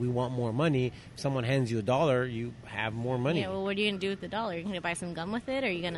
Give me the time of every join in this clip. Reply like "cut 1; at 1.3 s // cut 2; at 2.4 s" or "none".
none